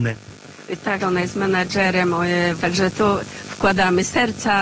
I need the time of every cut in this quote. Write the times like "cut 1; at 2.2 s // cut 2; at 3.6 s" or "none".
cut 1; at 1.0 s // cut 2; at 2.6 s